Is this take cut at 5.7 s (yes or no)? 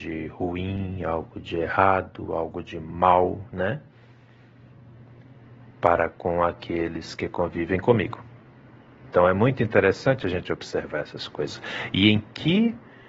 no